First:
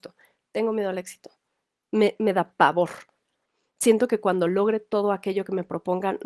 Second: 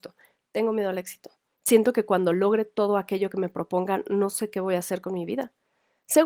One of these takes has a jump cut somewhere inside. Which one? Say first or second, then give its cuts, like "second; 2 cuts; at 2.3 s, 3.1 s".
second; 1 cut; at 1.5 s